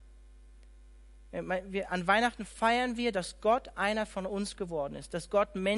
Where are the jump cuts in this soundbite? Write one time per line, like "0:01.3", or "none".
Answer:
none